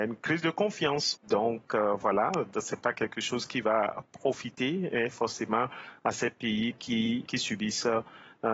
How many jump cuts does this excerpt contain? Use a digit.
2